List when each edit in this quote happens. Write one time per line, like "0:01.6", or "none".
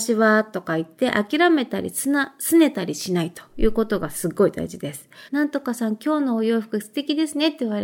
0:05.3